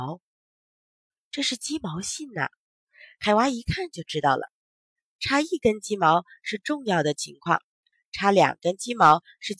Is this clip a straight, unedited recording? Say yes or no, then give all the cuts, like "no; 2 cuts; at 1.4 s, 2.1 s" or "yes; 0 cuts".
yes; 0 cuts